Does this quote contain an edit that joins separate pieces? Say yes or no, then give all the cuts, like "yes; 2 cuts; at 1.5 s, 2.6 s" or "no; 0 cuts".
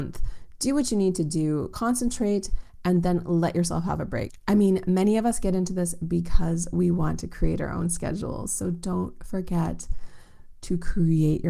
no; 0 cuts